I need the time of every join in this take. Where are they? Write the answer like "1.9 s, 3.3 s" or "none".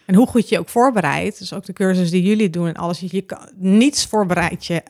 none